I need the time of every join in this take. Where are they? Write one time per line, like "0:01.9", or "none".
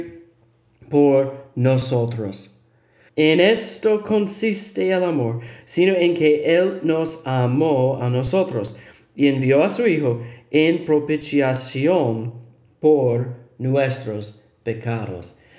0:03.1
0:05.6